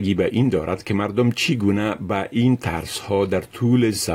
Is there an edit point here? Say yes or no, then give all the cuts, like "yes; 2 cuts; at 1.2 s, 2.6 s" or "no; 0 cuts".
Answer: no; 0 cuts